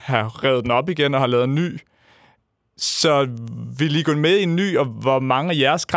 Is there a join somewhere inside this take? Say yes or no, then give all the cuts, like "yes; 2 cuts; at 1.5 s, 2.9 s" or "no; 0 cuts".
no; 0 cuts